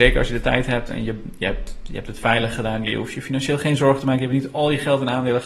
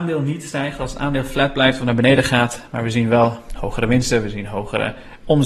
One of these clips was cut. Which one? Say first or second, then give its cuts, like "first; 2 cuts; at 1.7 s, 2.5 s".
first; 1 cut; at 2.9 s